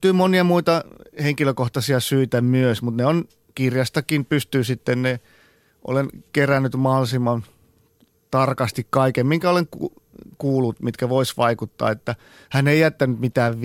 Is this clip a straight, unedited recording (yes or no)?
yes